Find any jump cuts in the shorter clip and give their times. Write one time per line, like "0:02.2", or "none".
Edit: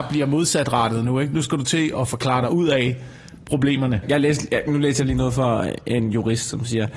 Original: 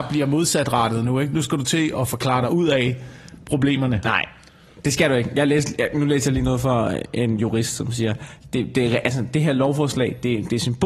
0:04.0